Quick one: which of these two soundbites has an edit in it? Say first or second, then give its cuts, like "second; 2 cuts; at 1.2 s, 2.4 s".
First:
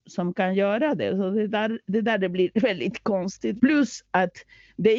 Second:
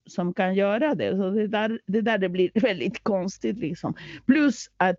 first; 1 cut; at 3.6 s